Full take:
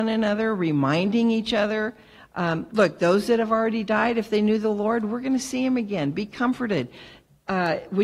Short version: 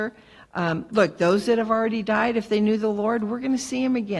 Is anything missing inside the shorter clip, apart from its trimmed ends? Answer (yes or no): no